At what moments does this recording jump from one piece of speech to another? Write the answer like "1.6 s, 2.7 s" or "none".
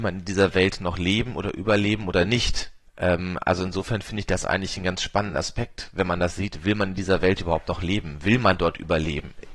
2.9 s